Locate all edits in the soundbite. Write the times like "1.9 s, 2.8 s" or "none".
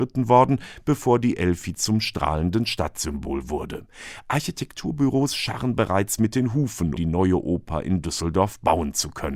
7.0 s